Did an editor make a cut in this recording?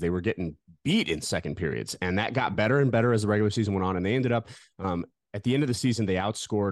no; 0 cuts

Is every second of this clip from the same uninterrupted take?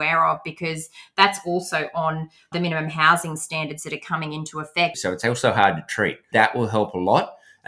no; 3 cuts; at 2.5 s, 4.9 s, 6.3 s

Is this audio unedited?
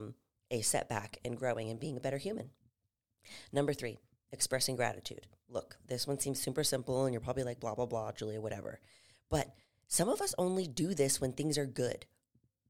yes; 0 cuts

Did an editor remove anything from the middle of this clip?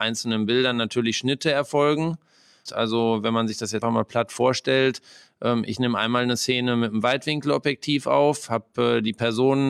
yes; 2 cuts; at 2.7 s, 3.8 s

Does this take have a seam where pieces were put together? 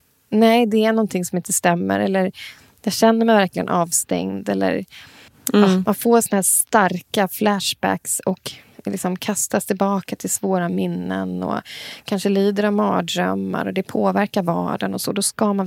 no; 0 cuts

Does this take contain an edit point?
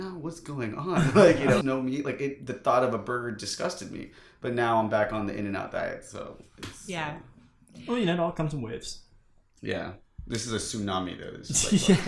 yes; 1 cut; at 1.6 s

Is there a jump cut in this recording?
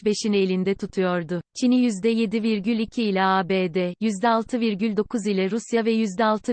yes; 1 cut; at 1.5 s

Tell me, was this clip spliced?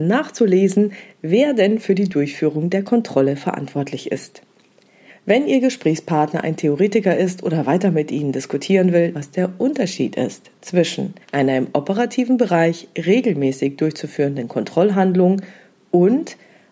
yes; 2 cuts; at 9.1 s, 11.2 s

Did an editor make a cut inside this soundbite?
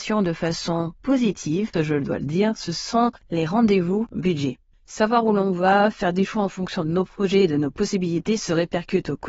yes; 2 cuts; at 1.7 s, 4.7 s

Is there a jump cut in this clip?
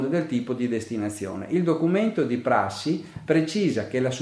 no; 0 cuts

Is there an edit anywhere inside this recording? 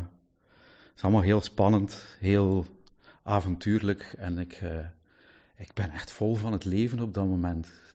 no; 0 cuts

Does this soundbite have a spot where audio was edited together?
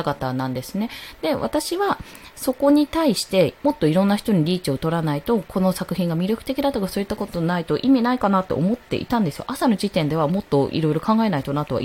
yes; 1 cut; at 3.6 s

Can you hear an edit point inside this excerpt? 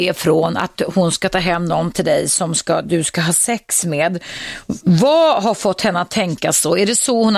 no; 0 cuts

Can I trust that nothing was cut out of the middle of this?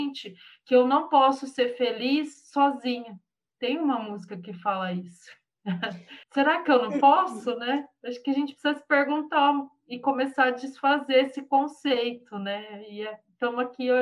no; 1 cut; at 6.2 s

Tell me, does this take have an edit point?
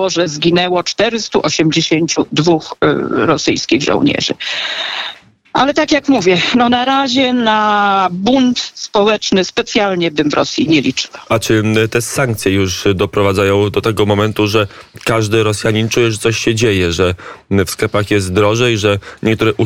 no; 0 cuts

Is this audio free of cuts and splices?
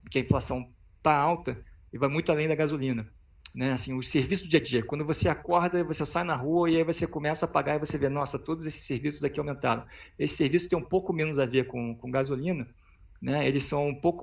yes; 0 cuts

